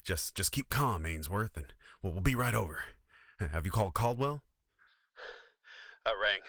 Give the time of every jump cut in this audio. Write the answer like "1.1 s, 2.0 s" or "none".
none